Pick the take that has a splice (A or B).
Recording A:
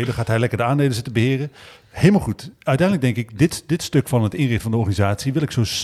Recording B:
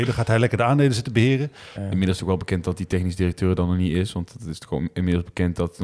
B